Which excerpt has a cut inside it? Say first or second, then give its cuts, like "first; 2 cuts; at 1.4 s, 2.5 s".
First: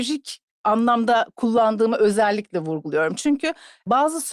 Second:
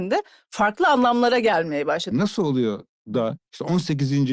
second; 1 cut; at 2.1 s